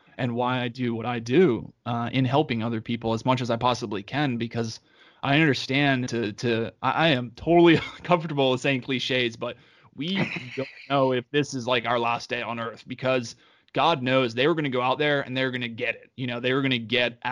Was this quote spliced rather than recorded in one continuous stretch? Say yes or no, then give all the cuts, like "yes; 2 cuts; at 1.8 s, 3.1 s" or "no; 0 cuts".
yes; 1 cut; at 6.1 s